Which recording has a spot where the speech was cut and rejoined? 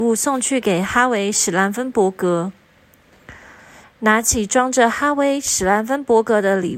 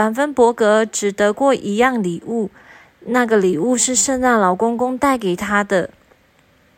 first; 1 cut; at 3.8 s

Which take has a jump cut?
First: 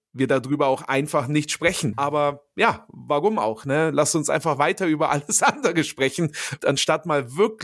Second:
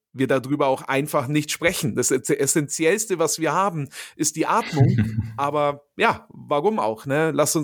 first; 2 cuts; at 1.9 s, 6.6 s

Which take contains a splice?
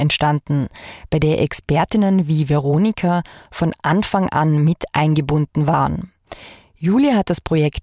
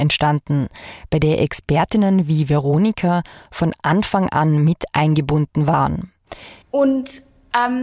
second; 1 cut; at 6.6 s

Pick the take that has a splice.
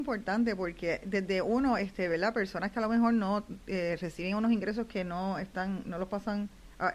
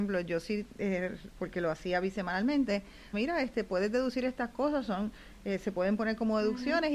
second; 2 cuts; at 1.3 s, 3.1 s

